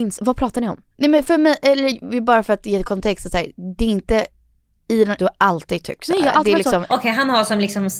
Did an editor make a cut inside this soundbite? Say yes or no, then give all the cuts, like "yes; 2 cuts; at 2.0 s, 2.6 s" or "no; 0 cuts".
yes; 2 cuts; at 5.2 s, 6.9 s